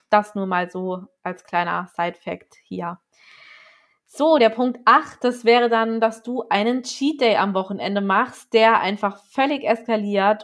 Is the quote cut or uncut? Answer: uncut